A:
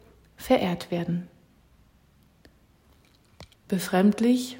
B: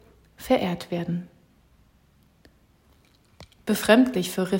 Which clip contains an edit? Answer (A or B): A